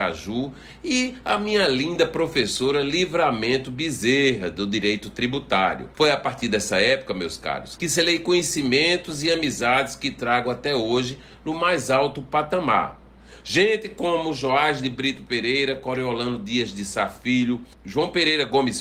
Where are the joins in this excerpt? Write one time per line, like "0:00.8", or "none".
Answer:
0:05.9